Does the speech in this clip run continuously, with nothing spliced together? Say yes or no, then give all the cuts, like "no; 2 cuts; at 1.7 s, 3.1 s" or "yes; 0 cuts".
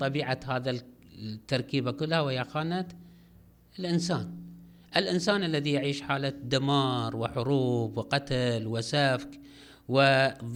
yes; 0 cuts